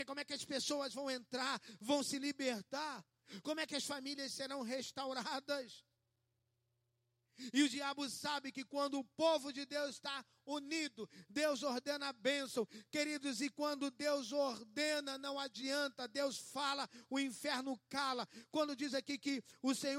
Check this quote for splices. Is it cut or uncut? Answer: uncut